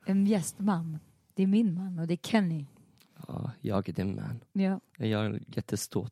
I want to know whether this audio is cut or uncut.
uncut